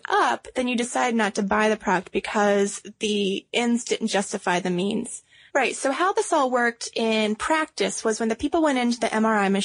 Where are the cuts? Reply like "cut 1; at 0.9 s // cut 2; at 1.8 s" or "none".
cut 1; at 5.5 s

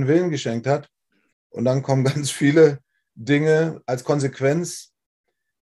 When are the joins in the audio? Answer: cut 1; at 1.3 s

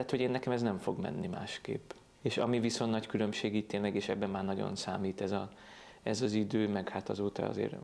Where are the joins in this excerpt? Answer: cut 1; at 2.2 s

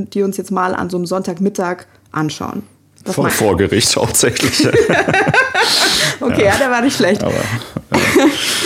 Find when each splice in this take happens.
cut 1; at 3.3 s

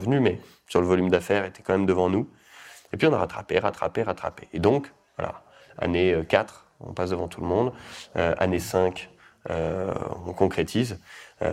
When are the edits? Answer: none

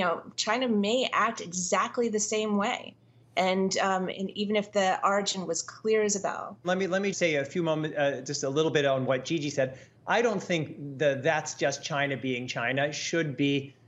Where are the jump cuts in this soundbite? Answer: cut 1; at 7.1 s

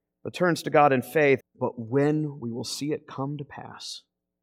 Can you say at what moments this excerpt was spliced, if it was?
cut 1; at 1.4 s

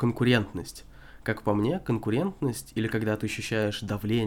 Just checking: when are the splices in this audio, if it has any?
none

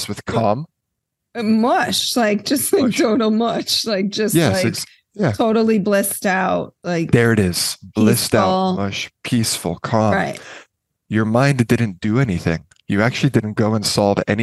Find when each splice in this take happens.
none

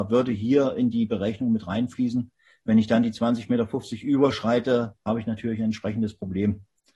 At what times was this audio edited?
none

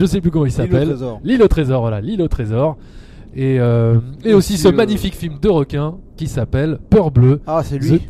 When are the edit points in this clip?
none

